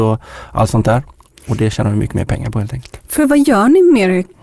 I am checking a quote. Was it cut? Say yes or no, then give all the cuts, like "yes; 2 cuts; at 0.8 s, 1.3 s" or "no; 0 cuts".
no; 0 cuts